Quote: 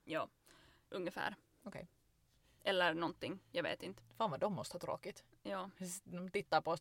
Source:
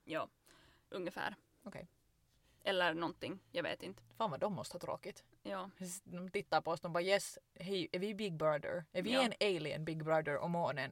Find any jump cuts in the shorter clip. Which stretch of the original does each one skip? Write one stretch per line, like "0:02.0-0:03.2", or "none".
none